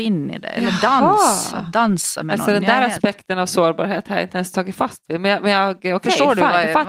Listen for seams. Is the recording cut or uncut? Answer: uncut